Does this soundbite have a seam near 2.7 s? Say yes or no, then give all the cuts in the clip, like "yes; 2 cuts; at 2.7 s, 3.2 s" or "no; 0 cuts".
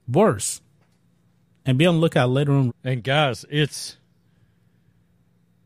yes; 1 cut; at 2.7 s